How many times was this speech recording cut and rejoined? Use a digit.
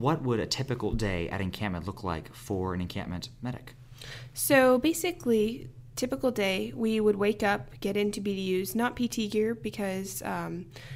0